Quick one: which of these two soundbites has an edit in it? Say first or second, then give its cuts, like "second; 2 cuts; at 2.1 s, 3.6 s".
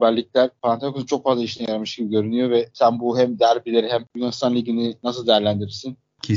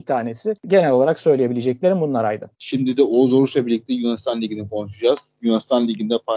second; 1 cut; at 2.5 s